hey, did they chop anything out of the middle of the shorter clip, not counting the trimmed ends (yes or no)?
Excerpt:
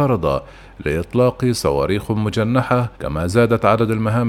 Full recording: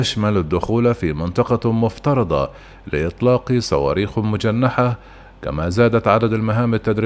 yes